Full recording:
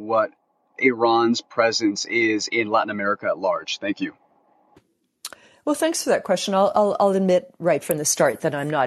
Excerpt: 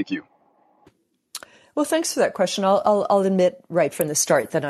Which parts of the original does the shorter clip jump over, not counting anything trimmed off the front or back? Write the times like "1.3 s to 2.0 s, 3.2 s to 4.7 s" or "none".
none